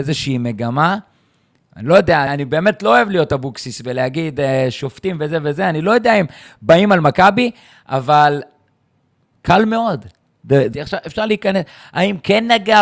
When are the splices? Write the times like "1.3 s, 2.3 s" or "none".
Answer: 2.3 s, 10.7 s